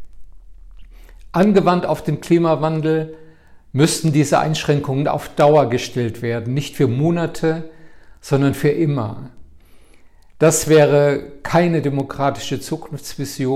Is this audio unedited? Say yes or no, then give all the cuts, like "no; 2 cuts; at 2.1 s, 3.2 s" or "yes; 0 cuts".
yes; 0 cuts